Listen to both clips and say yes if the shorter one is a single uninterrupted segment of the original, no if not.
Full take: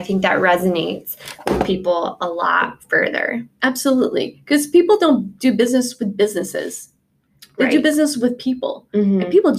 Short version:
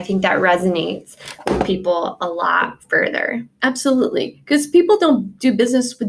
yes